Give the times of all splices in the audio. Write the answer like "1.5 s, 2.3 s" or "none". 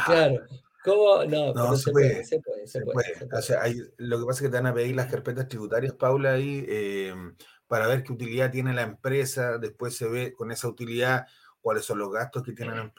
none